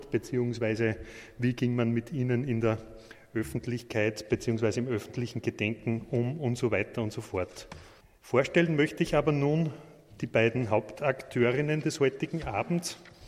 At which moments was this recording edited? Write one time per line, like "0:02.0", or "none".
none

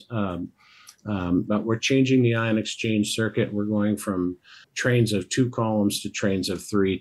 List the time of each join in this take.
0:01.5
0:04.6

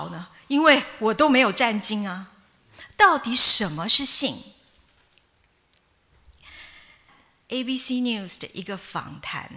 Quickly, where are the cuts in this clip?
0:07.1

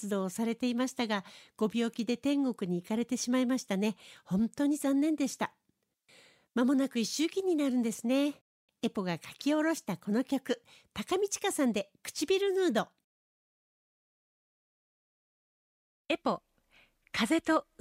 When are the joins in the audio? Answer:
0:08.7

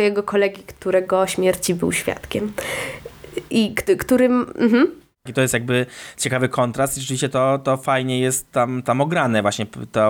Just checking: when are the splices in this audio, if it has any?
0:05.3

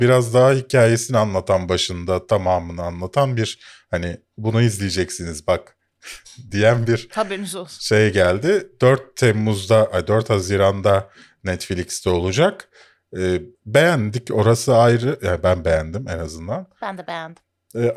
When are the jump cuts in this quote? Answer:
0:13.5

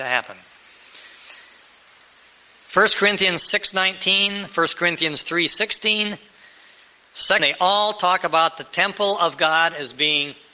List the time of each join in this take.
0:02.6
0:07.4

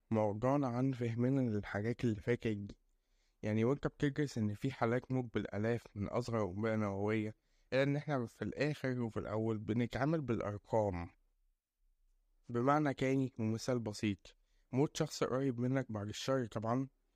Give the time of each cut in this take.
none

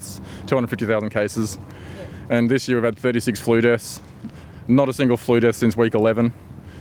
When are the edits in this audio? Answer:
none

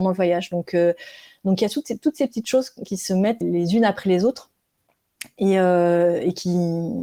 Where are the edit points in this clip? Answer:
0:03.4

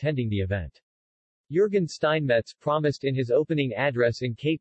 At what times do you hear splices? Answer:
0:01.3

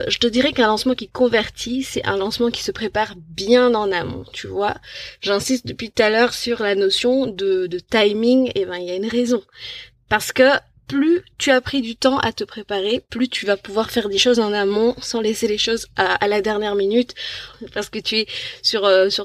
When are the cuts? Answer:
0:17.5

